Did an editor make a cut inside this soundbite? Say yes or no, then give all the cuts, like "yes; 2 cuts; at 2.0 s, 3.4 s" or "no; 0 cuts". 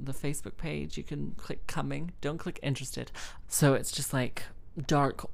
yes; 1 cut; at 3.4 s